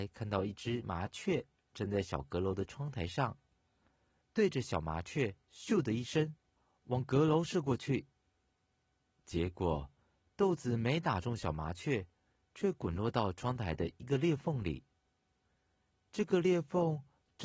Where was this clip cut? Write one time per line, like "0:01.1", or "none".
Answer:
0:04.2

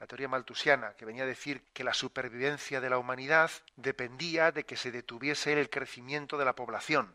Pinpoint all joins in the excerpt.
0:01.6
0:03.7

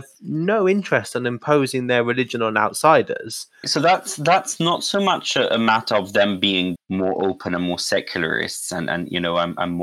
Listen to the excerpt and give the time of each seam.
0:03.6
0:06.8

